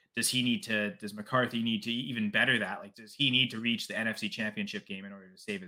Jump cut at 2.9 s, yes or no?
yes